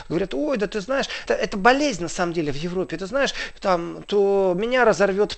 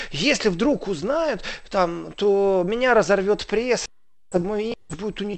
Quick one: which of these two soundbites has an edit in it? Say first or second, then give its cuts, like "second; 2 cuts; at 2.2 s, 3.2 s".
first; 2 cuts; at 1.3 s, 3.5 s